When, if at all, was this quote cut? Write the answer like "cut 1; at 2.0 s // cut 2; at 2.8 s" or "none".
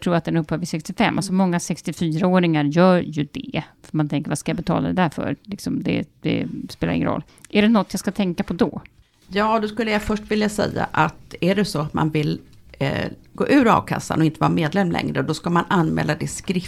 none